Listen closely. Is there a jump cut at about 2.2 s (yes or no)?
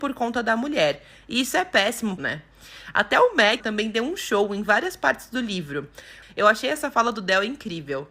yes